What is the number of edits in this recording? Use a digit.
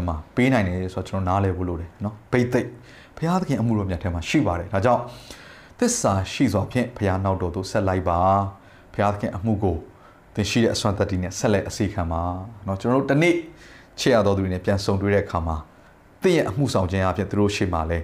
0